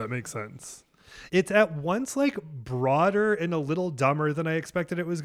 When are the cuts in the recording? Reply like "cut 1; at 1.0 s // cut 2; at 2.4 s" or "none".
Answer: none